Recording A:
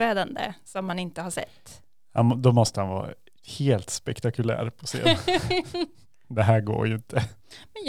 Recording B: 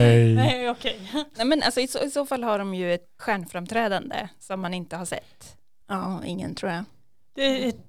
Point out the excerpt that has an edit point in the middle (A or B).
B